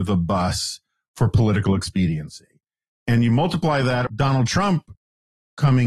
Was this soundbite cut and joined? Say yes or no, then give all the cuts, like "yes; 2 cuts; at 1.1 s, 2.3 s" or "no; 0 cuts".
yes; 1 cut; at 4.1 s